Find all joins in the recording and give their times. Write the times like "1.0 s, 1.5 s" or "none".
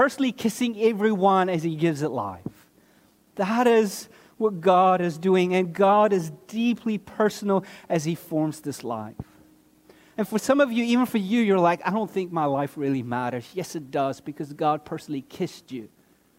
none